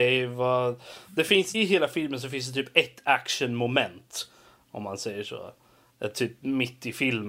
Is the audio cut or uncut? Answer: cut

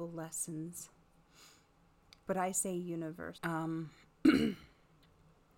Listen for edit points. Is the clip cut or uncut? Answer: cut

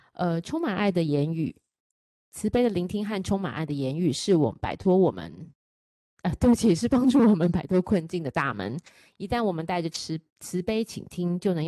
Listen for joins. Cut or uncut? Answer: uncut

